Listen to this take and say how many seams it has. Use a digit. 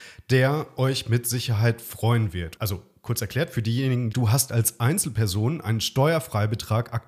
2